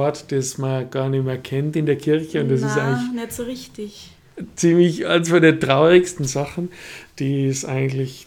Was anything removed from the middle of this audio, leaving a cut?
no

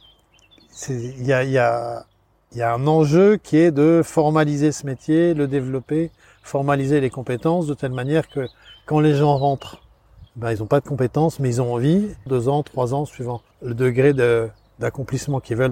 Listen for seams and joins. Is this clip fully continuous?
no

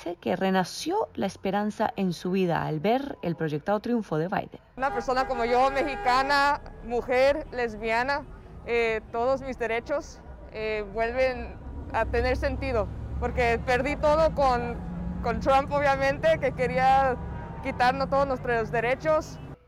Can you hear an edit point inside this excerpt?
no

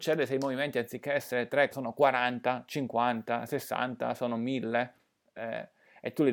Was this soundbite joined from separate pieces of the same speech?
yes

